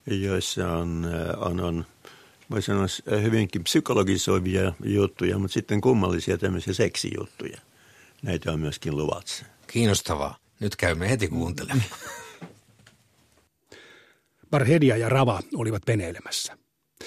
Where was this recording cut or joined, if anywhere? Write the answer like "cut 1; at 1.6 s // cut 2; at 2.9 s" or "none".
none

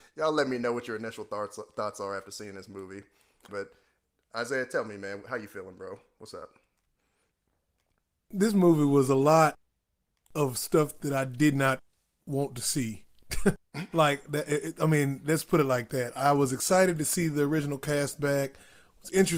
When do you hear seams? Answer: cut 1; at 3.5 s

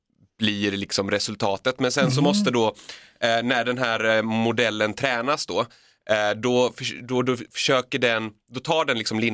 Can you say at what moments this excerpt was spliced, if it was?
none

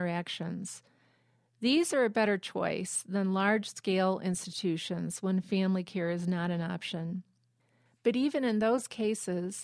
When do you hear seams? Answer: none

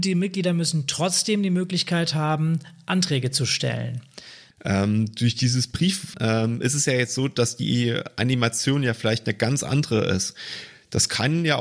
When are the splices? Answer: cut 1; at 4.5 s // cut 2; at 6.1 s

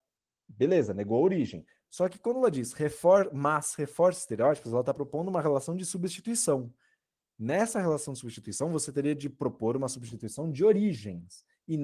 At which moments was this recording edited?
cut 1; at 1.9 s

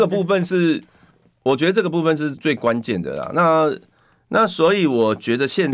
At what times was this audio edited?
cut 1; at 2.4 s

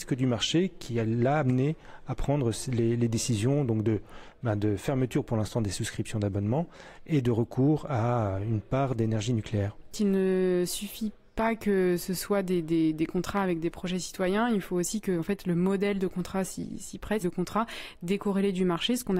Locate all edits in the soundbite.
cut 1; at 17.2 s

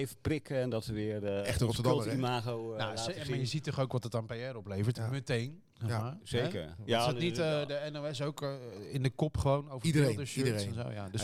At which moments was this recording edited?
none

